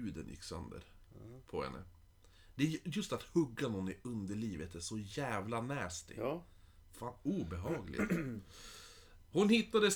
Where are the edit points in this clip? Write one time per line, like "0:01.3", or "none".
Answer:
none